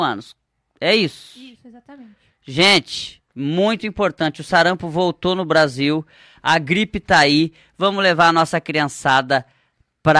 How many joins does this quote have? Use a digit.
0